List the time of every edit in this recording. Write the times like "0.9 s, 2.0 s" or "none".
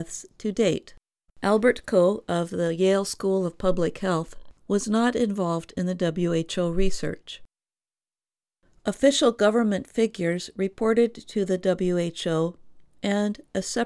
1.3 s, 8.7 s